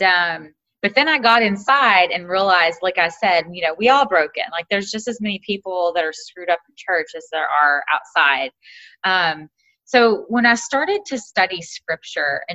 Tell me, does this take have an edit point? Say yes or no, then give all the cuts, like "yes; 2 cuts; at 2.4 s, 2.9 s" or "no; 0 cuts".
no; 0 cuts